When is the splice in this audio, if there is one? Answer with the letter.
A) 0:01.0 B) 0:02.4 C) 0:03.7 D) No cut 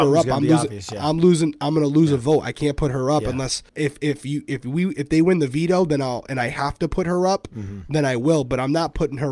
C